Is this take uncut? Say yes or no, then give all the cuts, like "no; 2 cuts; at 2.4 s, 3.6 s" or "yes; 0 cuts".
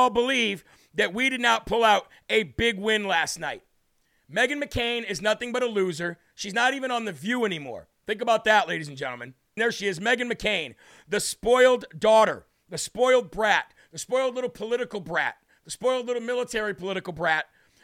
no; 1 cut; at 9.6 s